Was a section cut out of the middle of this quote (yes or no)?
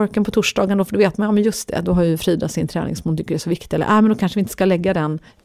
no